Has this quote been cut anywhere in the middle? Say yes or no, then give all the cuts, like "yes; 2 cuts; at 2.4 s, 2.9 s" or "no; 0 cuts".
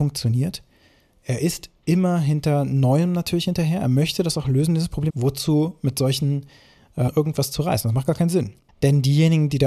yes; 3 cuts; at 5.1 s, 7.1 s, 8.7 s